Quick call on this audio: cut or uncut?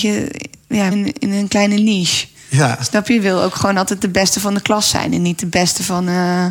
cut